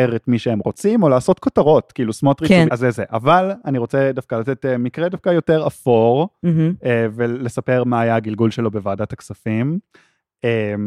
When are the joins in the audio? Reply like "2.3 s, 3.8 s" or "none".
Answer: 2.7 s